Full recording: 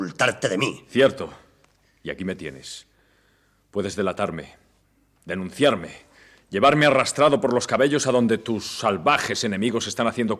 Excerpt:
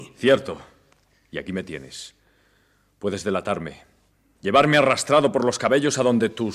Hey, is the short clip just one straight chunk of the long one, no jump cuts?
no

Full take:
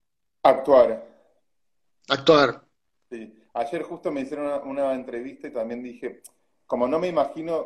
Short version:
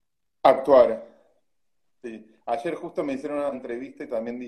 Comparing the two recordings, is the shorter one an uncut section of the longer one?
no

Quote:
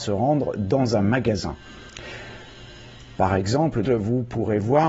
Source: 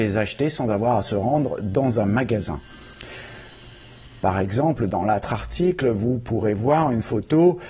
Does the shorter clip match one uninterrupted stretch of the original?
no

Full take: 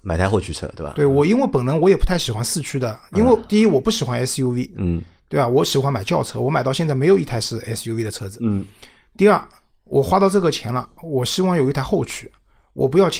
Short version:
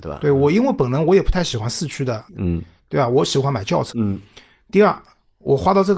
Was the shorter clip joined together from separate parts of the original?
yes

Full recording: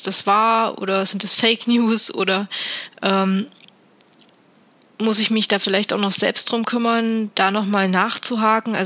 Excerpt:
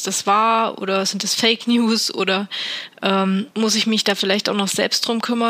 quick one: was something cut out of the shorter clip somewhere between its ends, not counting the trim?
yes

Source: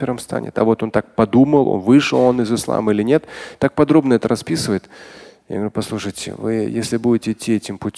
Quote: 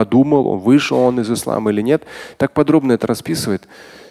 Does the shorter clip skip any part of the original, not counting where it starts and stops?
no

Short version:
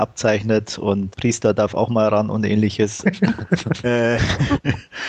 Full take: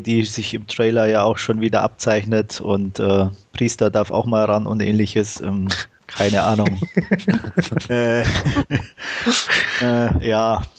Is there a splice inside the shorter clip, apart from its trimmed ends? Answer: yes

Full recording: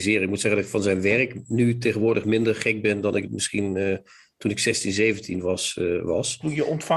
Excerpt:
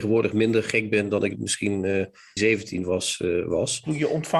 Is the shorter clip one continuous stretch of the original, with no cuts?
no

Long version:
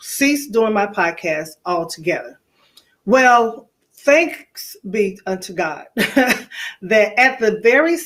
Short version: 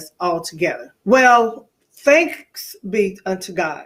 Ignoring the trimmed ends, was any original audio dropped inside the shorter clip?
yes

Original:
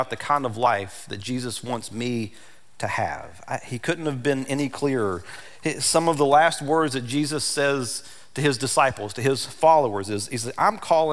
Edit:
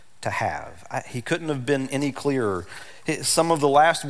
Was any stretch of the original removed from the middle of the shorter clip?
no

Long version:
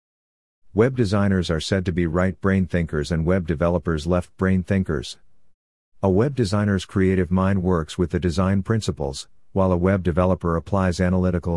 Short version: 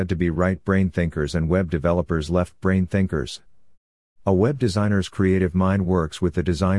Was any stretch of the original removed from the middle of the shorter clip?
no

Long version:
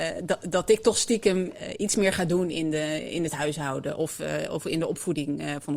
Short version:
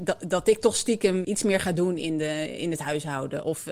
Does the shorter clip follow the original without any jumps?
no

